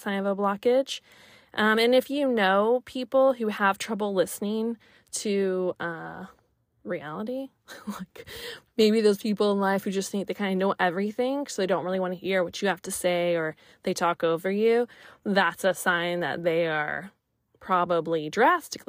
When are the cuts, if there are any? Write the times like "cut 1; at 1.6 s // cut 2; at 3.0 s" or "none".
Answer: none